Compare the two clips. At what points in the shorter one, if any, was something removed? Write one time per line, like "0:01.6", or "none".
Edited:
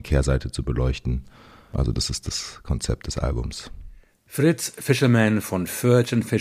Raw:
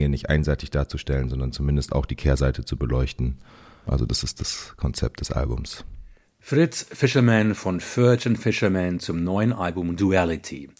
none

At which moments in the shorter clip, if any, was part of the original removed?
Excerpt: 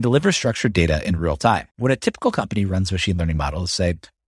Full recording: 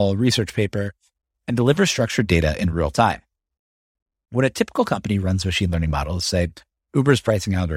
0:01.7

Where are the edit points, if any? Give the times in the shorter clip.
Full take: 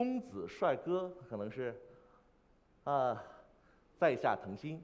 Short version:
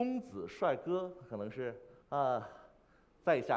0:02.0

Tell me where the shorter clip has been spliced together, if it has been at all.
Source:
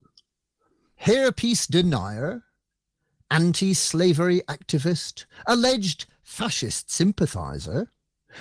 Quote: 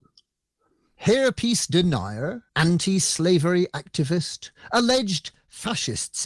0:02.5

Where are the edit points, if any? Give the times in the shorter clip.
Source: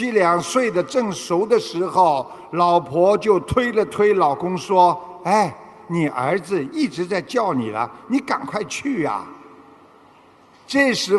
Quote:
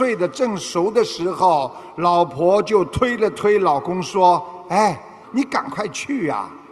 0:05.2

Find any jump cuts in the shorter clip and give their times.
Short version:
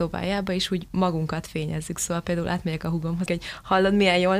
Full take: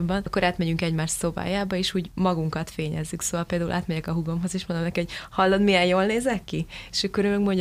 0:03.3

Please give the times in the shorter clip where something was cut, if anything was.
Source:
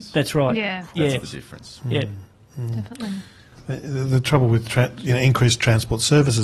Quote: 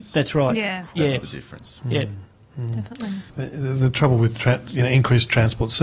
0:03.3

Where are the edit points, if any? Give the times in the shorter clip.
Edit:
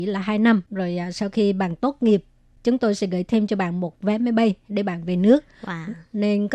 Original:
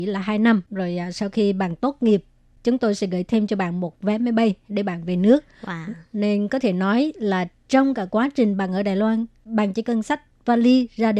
none

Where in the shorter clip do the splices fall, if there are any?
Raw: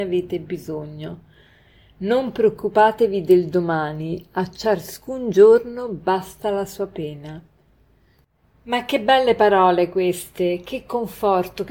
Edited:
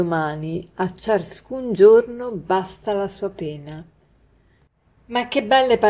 none

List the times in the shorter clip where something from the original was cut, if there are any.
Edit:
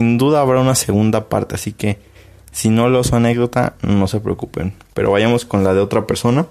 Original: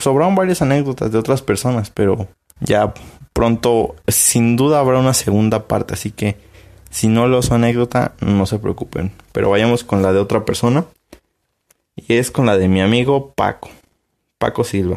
none

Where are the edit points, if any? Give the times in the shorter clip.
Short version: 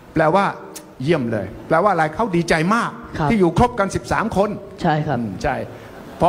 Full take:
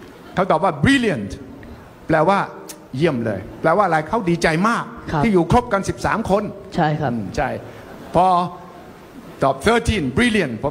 none

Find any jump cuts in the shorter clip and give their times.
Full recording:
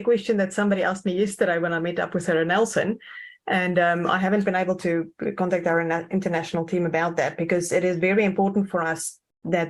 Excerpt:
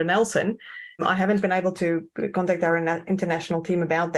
0:01.0

